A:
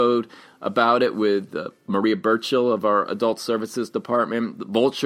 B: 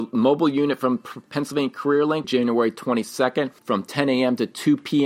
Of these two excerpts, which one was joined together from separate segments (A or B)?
B